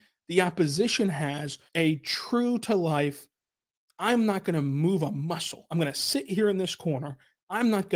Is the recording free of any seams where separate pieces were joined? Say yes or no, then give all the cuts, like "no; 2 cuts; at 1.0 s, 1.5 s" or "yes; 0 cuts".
no; 1 cut; at 1.7 s